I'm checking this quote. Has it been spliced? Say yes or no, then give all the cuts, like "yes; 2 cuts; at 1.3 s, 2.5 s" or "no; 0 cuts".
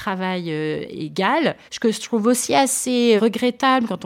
yes; 2 cuts; at 1.7 s, 3.2 s